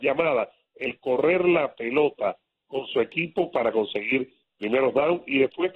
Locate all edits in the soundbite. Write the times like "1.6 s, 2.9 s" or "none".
none